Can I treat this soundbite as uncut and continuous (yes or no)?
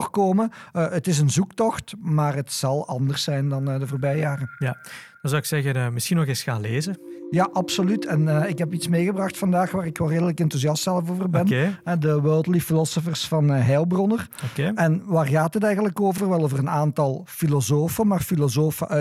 yes